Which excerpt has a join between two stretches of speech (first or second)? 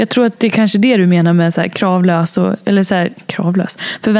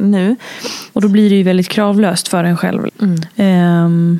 second